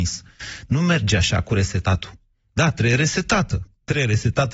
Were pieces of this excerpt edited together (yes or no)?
no